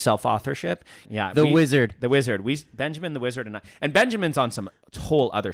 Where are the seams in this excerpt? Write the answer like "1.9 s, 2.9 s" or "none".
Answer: 1.0 s

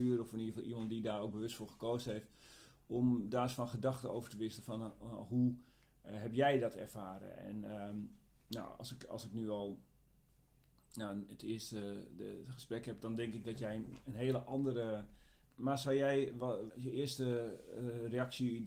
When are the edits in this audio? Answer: 15.4 s, 16.7 s

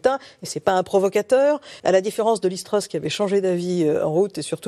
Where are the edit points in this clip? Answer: 1.8 s

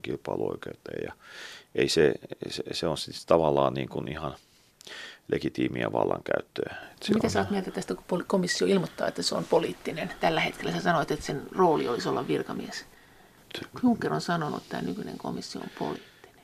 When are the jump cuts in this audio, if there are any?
none

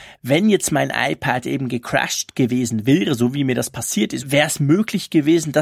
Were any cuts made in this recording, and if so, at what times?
4.2 s

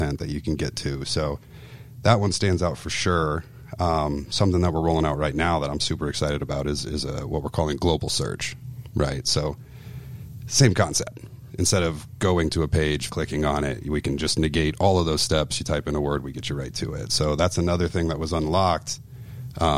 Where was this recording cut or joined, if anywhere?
13.1 s

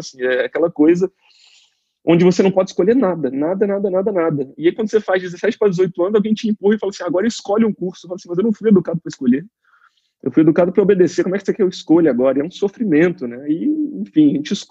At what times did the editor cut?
none

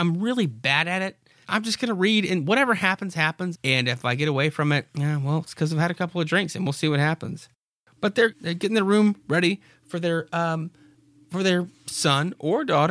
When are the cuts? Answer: 1.4 s, 3.5 s, 8.3 s

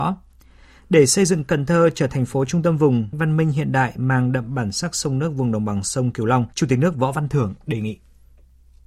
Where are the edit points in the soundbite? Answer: 2.1 s, 3.1 s, 6.5 s

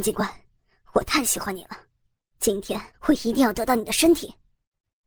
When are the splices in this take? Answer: 2.9 s

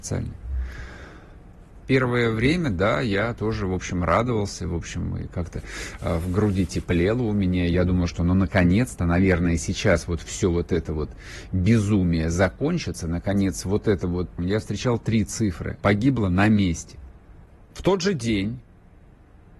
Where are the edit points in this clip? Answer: 1.8 s, 14.4 s, 15.8 s

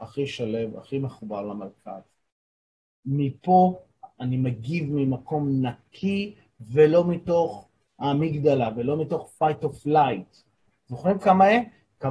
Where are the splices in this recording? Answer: 10.7 s

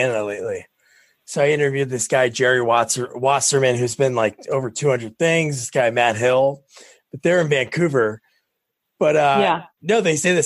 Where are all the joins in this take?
none

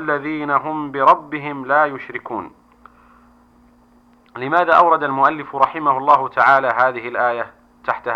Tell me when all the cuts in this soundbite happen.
none

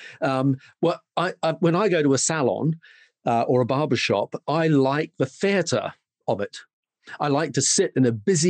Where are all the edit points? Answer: none

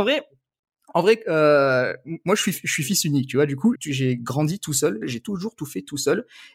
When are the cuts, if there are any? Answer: 3.7 s, 5.0 s

